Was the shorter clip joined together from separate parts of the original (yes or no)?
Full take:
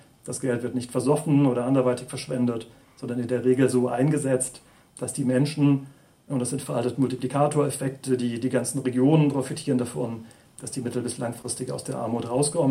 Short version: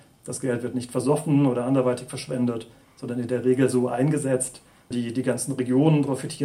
yes